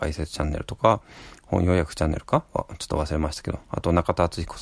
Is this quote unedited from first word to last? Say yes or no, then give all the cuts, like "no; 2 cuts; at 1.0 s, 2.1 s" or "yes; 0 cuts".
yes; 0 cuts